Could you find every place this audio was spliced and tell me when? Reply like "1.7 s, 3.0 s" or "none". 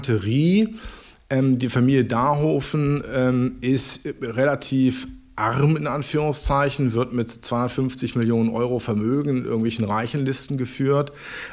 none